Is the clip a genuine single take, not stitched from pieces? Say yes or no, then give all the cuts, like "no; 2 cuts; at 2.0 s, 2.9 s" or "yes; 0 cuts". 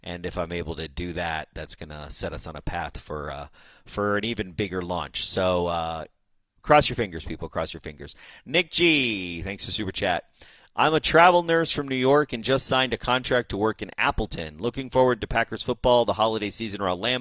yes; 0 cuts